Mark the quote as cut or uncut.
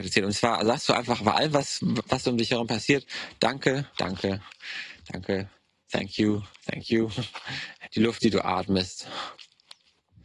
cut